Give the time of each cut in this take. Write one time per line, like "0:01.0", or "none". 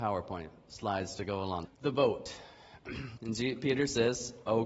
0:01.6
0:03.2